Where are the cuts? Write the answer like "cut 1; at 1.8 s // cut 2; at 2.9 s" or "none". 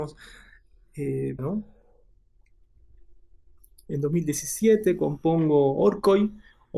cut 1; at 1.4 s